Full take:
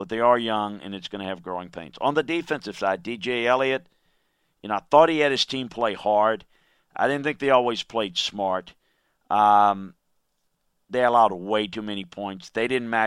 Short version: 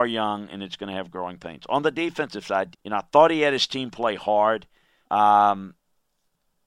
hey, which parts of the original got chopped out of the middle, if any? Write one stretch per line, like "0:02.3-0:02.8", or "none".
0:03.0-0:04.5
0:06.8-0:09.2